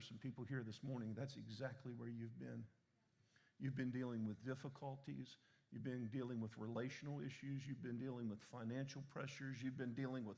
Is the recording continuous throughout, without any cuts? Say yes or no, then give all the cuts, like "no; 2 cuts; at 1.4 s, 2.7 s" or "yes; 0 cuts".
yes; 0 cuts